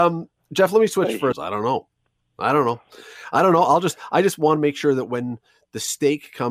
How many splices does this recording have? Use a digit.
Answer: 1